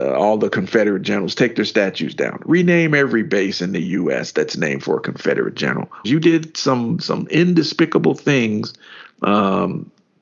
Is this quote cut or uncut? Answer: cut